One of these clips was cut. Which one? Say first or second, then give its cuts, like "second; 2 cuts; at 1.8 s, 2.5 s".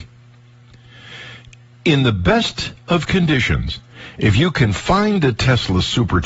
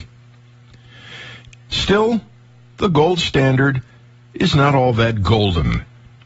second; 1 cut; at 1.7 s